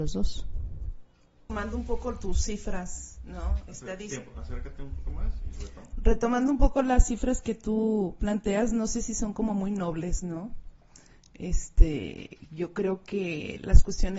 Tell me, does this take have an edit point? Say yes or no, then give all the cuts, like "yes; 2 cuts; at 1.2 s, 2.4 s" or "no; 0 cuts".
no; 0 cuts